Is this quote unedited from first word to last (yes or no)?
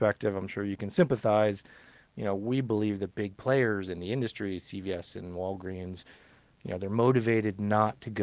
yes